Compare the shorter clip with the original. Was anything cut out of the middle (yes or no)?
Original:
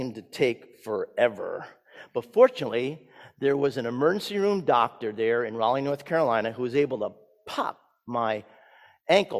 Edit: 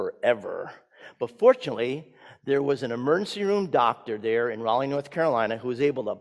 no